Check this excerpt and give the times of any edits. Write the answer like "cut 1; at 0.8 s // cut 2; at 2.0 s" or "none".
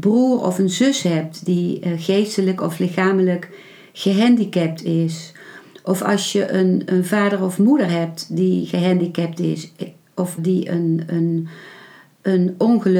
cut 1; at 10.4 s